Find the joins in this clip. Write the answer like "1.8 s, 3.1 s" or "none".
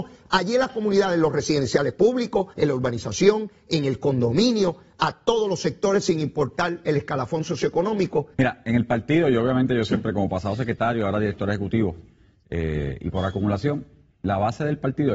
2.5 s, 8.3 s